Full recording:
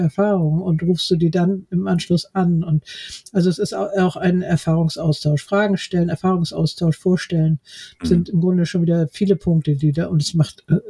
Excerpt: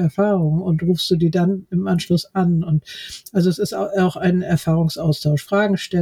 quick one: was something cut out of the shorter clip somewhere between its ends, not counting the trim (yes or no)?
no